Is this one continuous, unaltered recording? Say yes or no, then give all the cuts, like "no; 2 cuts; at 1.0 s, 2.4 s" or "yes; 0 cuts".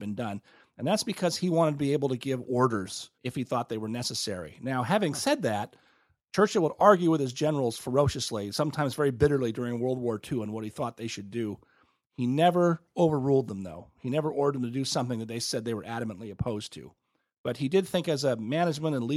no; 1 cut; at 3.1 s